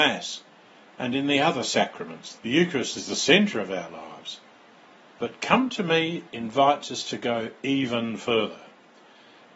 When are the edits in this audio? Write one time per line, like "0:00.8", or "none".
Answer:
0:02.4